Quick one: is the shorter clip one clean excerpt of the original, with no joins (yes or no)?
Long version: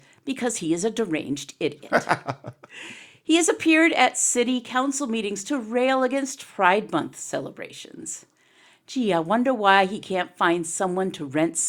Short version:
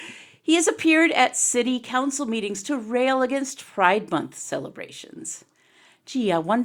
yes